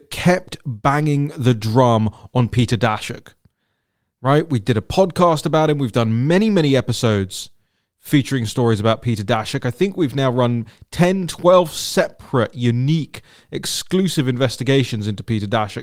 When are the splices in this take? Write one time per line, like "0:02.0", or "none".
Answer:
none